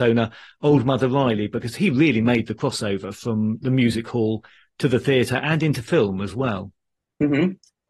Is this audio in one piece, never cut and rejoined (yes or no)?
yes